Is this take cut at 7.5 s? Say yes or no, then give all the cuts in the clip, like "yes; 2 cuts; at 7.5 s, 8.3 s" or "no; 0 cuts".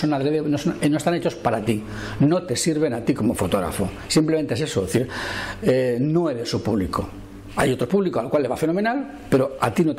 no; 0 cuts